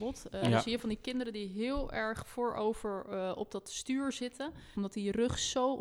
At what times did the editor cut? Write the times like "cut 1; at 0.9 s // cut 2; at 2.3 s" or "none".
cut 1; at 4.7 s